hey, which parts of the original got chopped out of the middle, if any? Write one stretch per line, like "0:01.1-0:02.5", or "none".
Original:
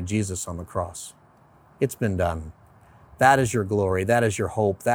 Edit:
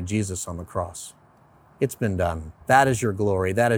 0:02.6-0:03.1